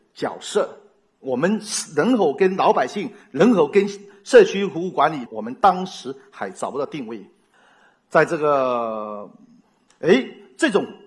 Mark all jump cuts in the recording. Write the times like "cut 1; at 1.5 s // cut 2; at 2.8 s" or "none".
cut 1; at 5.3 s // cut 2; at 9.9 s